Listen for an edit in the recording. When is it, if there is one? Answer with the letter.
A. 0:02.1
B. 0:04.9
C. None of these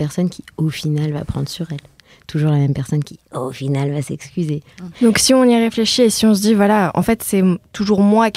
B